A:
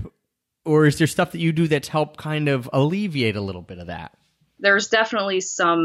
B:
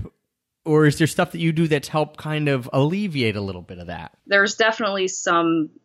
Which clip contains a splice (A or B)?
B